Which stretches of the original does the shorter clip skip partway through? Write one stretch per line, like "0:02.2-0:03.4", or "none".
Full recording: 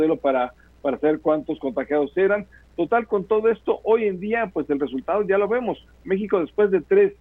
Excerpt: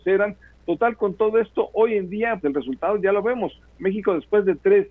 0:04.5-0:04.7